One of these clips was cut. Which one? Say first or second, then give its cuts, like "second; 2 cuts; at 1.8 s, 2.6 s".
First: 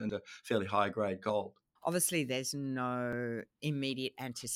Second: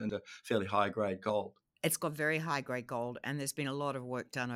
first; 1 cut; at 1.8 s